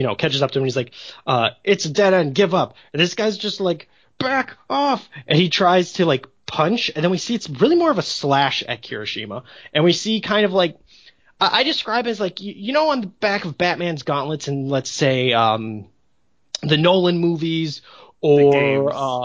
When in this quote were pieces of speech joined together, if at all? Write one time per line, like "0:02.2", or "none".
none